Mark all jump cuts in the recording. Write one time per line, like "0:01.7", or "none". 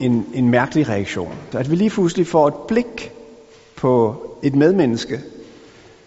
0:01.5